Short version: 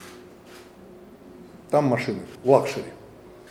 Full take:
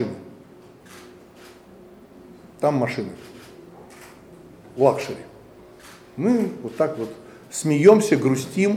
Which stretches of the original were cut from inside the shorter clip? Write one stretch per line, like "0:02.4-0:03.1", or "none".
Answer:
0:03.3-0:04.7

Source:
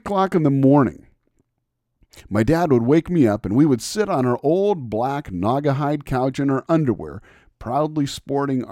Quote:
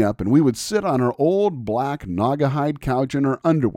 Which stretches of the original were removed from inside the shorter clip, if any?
none

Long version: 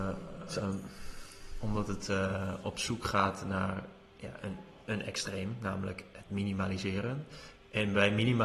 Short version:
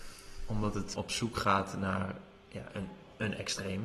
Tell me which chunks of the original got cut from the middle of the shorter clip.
0:02.1-0:02.6

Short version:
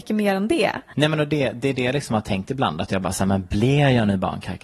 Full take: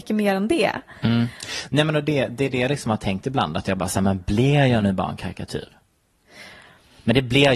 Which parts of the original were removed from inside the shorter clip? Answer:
0:00.9-0:01.7

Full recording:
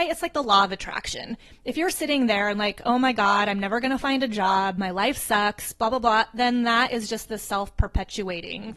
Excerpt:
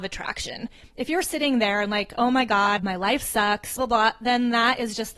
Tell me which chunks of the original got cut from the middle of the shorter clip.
0:03.5-0:04.7
0:05.7-0:05.9

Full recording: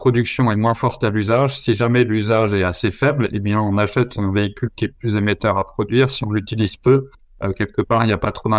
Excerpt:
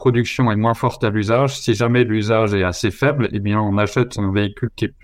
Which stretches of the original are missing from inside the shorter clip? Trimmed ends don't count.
none

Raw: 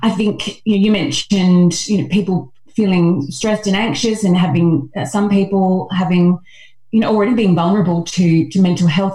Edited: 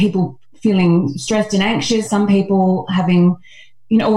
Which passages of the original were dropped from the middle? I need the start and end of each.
0:04.2-0:05.1

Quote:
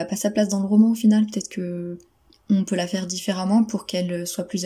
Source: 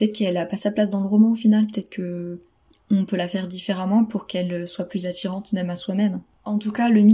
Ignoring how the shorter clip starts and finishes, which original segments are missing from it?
none

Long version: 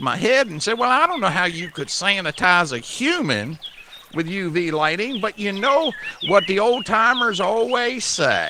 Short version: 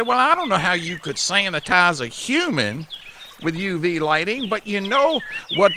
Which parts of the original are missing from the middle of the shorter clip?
none

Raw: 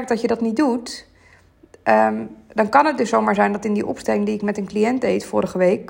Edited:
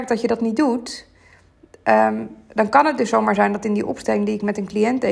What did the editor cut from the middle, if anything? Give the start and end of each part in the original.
none

